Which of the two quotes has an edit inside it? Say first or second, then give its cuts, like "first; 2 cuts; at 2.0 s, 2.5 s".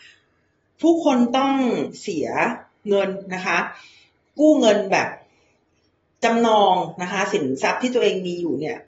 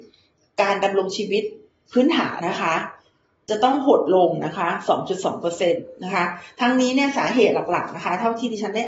second; 1 cut; at 2.4 s